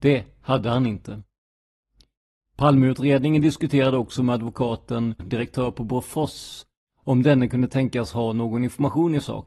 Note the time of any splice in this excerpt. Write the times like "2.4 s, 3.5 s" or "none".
5.2 s

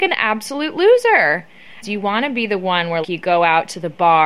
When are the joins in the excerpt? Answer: 1.8 s, 3.0 s

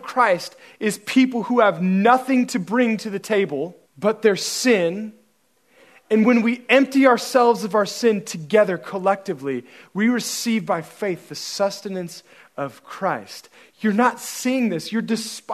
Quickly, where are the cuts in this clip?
3.9 s

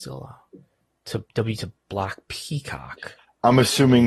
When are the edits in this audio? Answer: 1.3 s

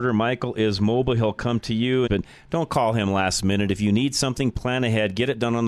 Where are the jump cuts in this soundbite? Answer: 2.1 s

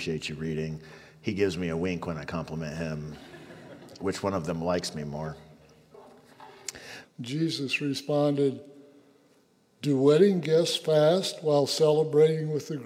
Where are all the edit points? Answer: 7.0 s

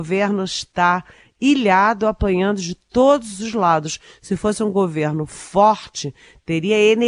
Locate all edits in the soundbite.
none

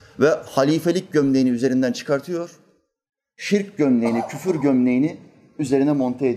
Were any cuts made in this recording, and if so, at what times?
none

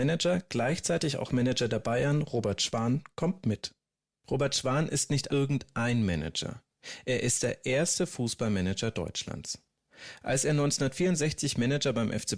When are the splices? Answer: 5.3 s

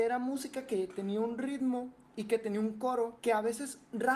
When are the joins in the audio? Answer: 3.2 s

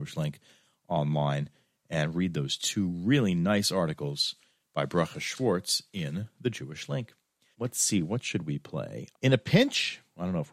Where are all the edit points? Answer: 7.5 s, 9.1 s

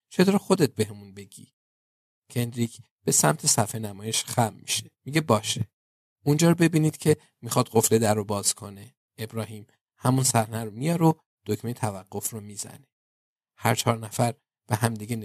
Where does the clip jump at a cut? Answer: 5.0 s, 9.0 s

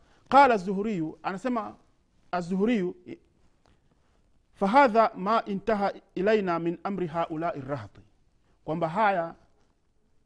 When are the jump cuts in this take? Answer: none

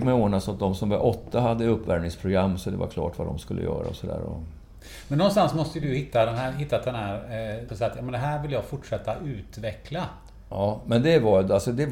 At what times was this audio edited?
7.7 s

